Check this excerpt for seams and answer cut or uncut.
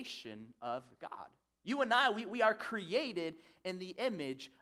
uncut